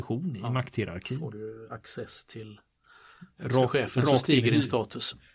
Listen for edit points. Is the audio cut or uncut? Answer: uncut